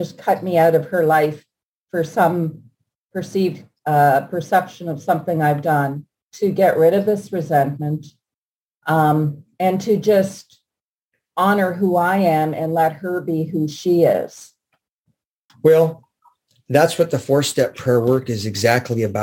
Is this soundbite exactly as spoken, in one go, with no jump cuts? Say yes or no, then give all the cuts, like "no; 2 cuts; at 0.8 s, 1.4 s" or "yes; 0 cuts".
no; 2 cuts; at 6.1 s, 15.5 s